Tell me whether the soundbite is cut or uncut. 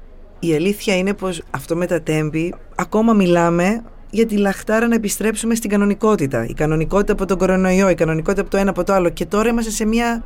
uncut